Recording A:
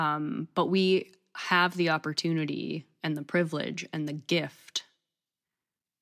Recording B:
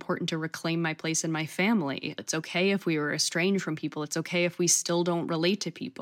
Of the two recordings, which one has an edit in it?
B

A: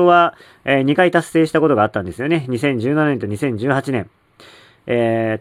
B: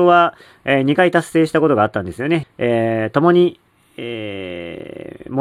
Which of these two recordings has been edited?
B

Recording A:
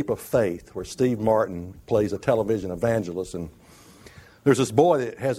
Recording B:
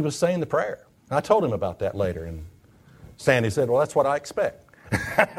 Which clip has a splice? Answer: B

